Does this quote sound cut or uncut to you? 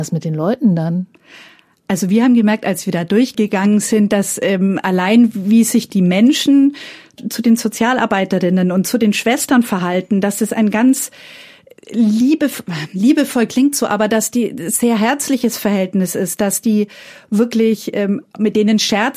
uncut